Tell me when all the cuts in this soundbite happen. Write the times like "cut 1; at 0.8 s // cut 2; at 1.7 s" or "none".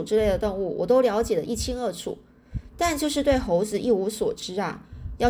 none